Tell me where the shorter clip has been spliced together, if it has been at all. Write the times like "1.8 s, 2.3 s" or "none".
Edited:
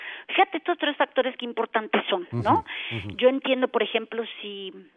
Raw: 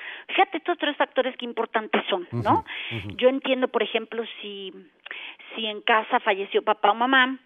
none